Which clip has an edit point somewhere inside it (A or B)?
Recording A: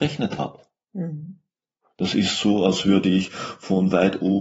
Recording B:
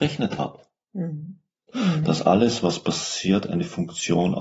B